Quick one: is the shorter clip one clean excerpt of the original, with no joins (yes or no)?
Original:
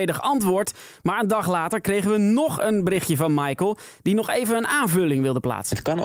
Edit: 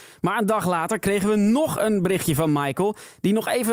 yes